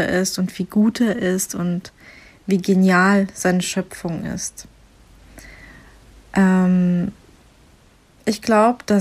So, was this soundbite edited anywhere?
no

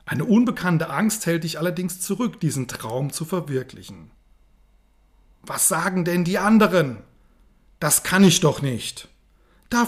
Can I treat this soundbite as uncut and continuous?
yes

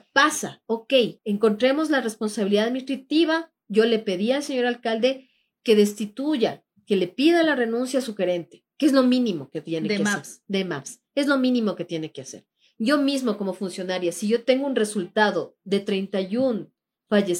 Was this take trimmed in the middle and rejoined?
yes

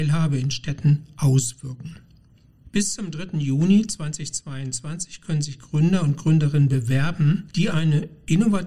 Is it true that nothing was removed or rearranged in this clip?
yes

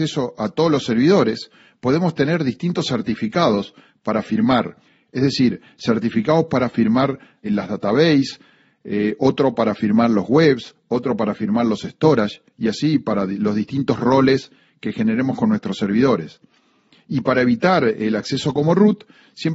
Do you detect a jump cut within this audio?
yes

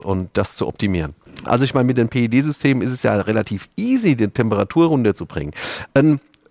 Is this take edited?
yes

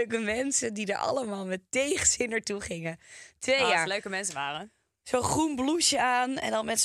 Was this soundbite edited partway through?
no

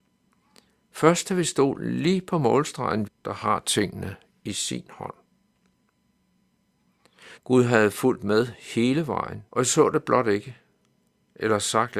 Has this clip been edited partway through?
yes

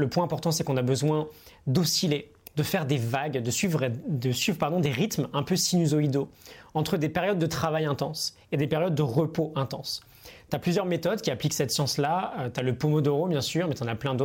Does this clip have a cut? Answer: no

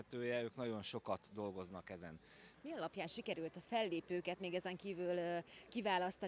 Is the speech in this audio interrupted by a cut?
yes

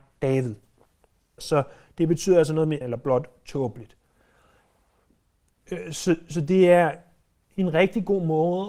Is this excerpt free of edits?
no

